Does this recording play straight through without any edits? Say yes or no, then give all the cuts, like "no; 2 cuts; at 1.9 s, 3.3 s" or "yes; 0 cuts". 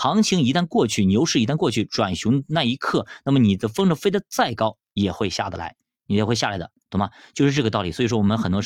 yes; 0 cuts